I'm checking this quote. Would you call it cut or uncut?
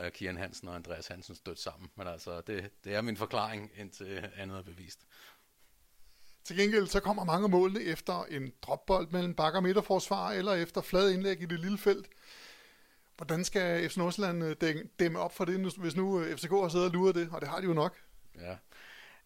uncut